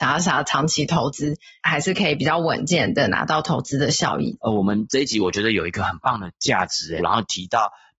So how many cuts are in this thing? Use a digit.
2